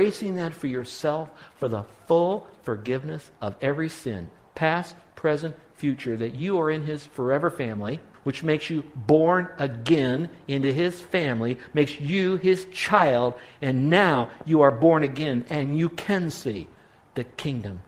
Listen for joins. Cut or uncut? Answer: cut